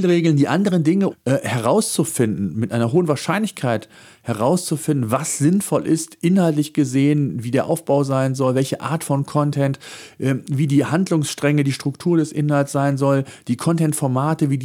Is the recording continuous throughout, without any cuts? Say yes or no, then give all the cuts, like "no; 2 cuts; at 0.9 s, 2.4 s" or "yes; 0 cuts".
no; 1 cut; at 1.1 s